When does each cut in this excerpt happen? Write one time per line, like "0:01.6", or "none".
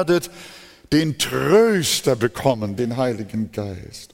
0:02.8